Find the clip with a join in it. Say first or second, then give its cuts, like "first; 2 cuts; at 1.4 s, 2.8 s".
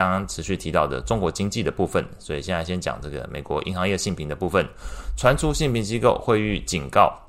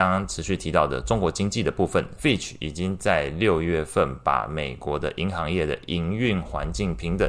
second; 1 cut; at 2.2 s